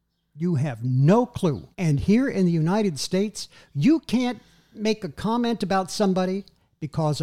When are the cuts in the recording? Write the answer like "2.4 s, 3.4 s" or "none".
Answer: 1.7 s

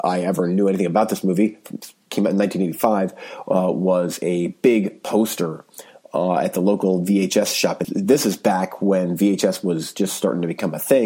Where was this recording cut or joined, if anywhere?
7.8 s

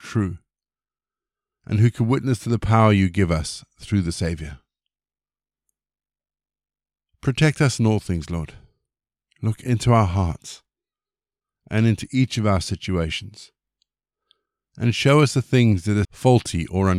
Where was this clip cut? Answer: 16.0 s

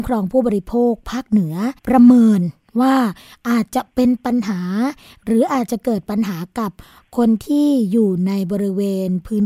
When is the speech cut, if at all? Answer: 1.8 s

